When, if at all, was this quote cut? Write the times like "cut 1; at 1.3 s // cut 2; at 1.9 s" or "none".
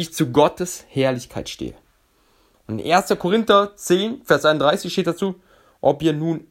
none